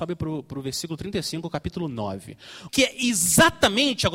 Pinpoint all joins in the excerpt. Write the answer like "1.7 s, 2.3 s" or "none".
2.7 s

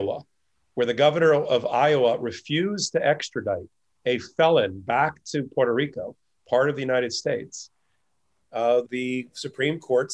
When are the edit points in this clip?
8.8 s

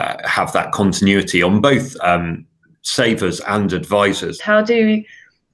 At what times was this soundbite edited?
4.4 s

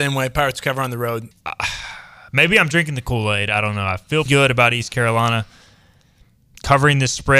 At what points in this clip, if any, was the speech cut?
1.3 s, 4.3 s

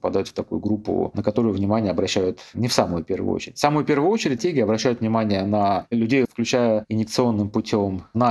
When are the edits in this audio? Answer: 4.4 s, 6.3 s

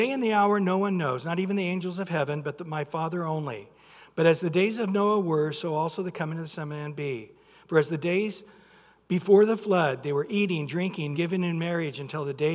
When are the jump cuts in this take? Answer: 11.1 s

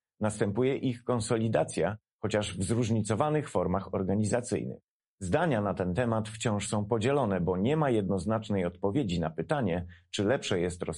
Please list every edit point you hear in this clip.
5.0 s

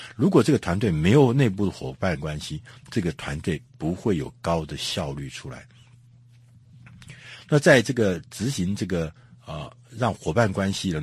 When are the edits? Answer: none

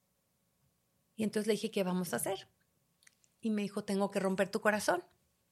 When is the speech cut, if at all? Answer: none

